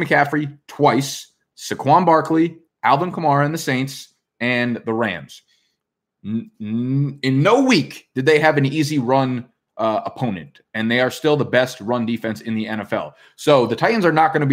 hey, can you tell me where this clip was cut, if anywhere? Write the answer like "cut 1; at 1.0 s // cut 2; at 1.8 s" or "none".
none